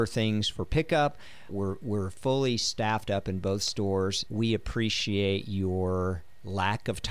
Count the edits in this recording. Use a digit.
2